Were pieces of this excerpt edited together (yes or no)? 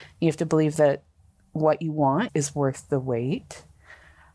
yes